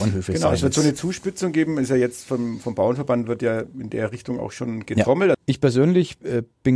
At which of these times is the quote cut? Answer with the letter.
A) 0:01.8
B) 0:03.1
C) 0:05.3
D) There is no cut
C